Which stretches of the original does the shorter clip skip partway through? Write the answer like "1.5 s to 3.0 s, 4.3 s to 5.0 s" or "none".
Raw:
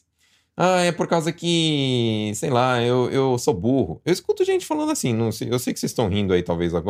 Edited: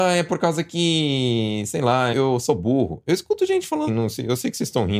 2.8 s to 3.1 s, 4.9 s to 5.1 s